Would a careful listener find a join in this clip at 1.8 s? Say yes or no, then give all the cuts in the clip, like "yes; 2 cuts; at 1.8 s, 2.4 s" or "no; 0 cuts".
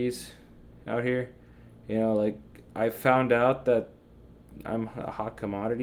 no; 0 cuts